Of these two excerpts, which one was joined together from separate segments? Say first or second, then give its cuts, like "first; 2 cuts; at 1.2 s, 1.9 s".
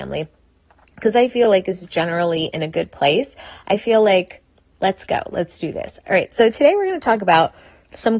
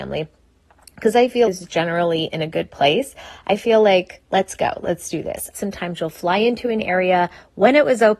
second; 3 cuts; at 1.4 s, 4.3 s, 5.5 s